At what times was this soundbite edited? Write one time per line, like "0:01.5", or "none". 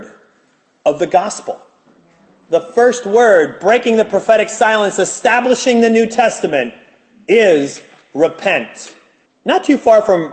0:09.2